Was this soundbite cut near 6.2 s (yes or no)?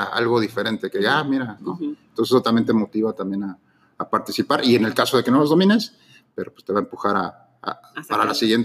yes